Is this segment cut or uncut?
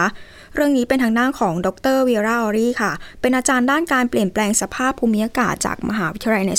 uncut